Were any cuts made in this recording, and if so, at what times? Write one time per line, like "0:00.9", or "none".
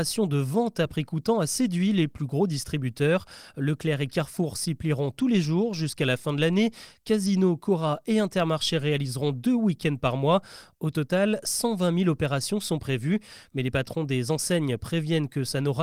none